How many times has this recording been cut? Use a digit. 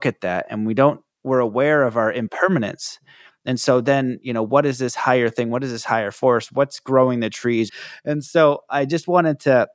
1